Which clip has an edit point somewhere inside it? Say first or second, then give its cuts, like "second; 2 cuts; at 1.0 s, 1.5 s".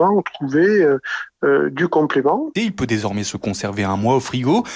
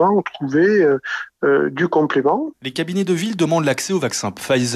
first; 1 cut; at 2.6 s